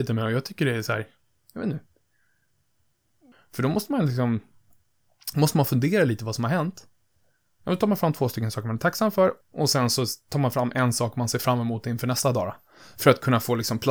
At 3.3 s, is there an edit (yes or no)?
yes